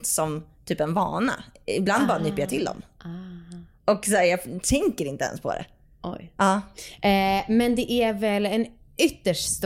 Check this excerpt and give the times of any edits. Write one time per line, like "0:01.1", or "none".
none